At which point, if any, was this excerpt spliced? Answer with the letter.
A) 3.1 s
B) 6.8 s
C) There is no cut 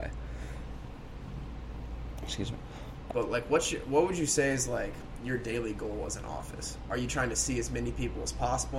A